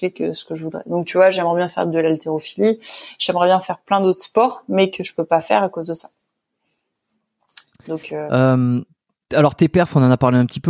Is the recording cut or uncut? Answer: uncut